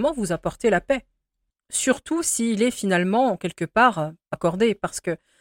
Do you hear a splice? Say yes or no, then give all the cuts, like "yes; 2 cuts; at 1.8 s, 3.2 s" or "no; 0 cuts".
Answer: yes; 1 cut; at 4.3 s